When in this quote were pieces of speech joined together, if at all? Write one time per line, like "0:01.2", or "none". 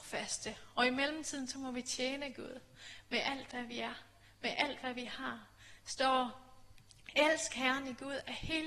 none